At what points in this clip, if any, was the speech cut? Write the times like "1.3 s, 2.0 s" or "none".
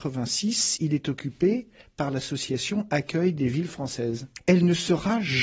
4.4 s